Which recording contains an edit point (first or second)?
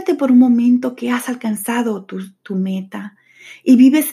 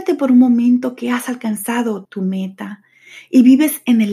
second